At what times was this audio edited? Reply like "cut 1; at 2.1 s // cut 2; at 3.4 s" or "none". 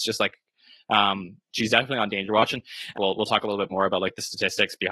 cut 1; at 3.0 s